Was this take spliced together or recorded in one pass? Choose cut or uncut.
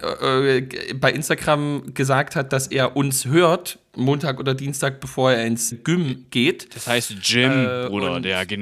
cut